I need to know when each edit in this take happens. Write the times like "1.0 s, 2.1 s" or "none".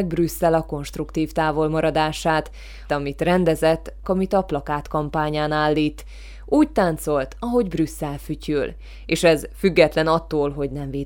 2.9 s, 4.0 s